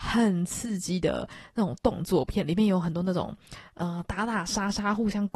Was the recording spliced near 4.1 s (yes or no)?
no